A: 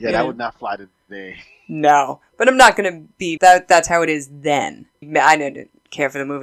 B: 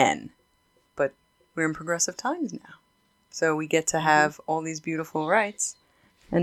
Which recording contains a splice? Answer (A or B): A